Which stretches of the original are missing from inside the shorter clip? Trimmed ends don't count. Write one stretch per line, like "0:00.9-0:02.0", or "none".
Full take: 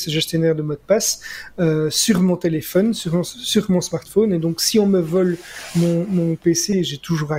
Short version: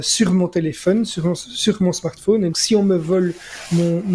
0:04.4-0:04.6